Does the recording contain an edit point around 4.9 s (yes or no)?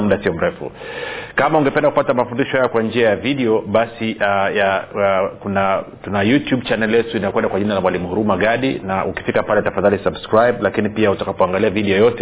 no